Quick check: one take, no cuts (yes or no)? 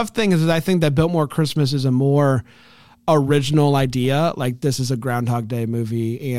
yes